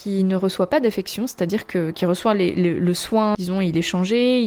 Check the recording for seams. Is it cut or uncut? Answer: uncut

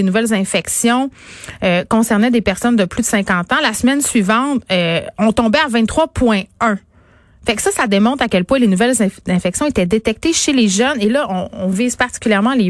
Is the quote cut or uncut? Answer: uncut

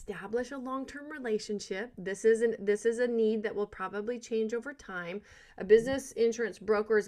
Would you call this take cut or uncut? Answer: uncut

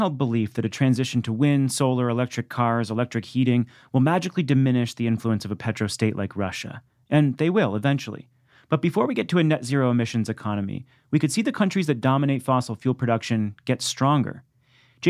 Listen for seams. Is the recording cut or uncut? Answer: uncut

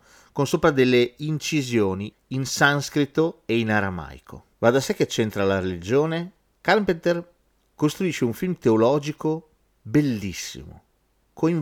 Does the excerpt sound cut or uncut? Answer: cut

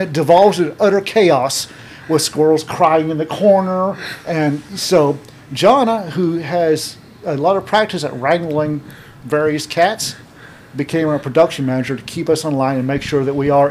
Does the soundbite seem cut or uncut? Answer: cut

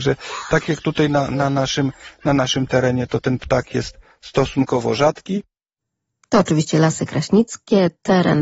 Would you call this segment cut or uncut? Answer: uncut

